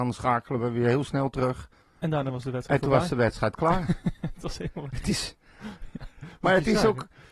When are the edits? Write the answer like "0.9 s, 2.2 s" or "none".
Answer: 1.8 s

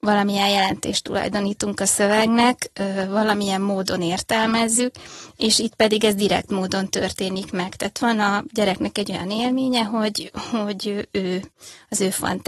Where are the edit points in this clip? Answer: none

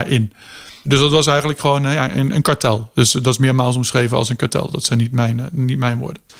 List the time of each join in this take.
none

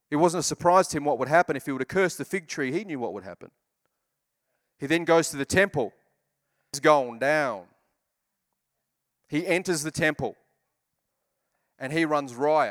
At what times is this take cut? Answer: none

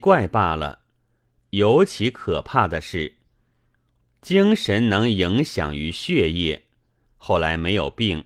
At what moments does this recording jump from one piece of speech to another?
7.0 s

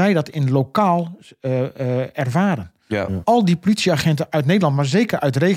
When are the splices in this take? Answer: 3.2 s

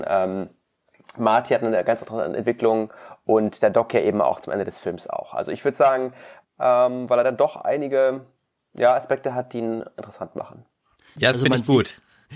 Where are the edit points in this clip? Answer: 6.4 s

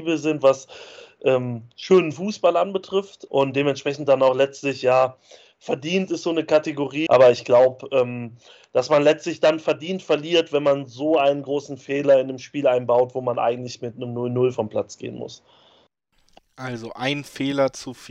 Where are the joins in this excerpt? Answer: 3.3 s, 7.1 s

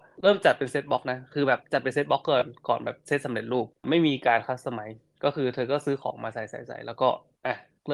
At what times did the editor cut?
none

